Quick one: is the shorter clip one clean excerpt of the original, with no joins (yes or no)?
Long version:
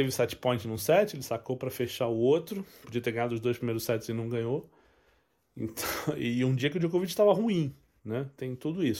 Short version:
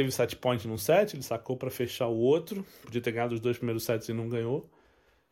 yes